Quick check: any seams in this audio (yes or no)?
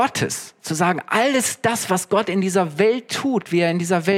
no